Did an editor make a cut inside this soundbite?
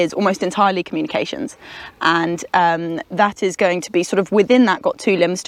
no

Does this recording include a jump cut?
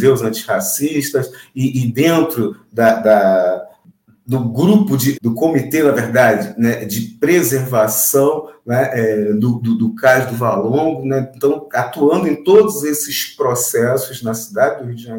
yes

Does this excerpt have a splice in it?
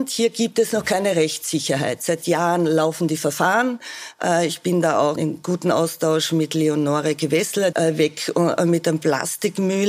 yes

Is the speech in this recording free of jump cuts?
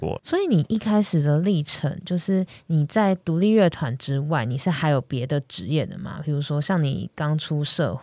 yes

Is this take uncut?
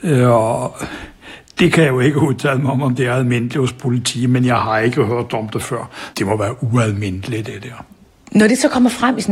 no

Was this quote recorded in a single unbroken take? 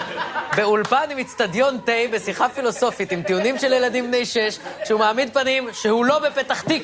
yes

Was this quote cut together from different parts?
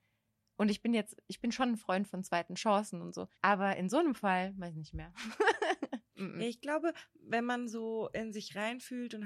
yes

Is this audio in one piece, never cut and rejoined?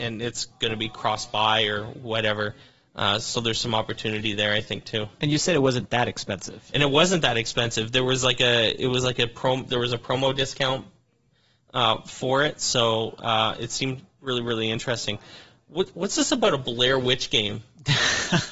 yes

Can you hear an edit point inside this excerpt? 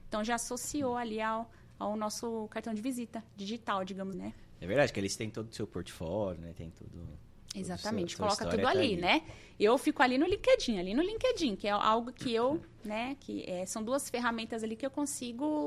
yes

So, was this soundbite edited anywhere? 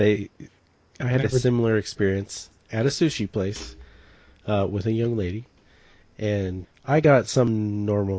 yes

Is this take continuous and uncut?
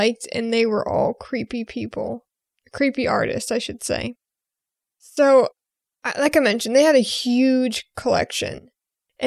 yes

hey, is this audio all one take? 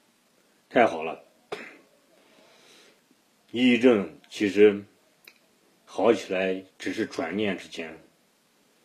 yes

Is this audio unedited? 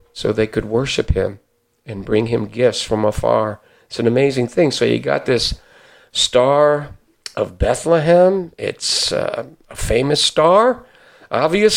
yes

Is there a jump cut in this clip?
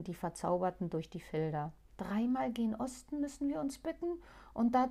yes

